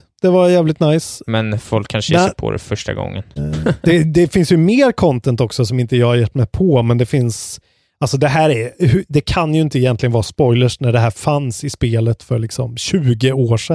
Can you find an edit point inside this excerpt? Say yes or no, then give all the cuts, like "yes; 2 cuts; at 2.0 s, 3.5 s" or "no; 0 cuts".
yes; 2 cuts; at 1.3 s, 3.4 s